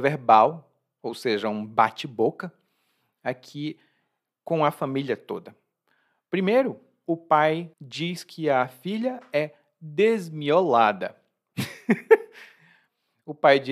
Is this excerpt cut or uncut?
cut